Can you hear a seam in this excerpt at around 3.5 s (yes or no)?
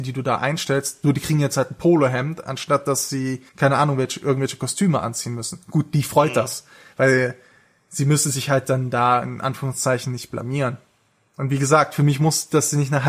yes